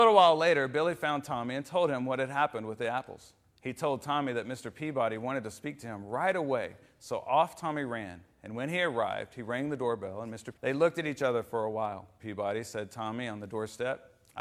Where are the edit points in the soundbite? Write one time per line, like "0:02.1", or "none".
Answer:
0:10.5
0:12.2